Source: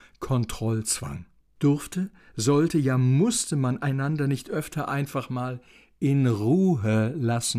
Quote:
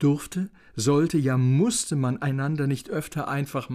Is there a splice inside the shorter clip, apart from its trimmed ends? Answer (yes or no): no